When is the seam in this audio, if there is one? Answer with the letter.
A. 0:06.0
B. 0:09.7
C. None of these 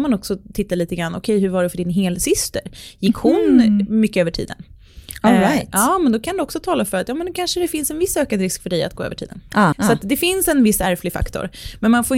B